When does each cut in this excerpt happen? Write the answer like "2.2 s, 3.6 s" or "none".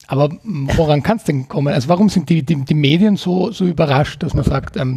none